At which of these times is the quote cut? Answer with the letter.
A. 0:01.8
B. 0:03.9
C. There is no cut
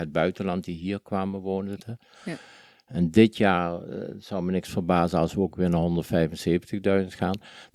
A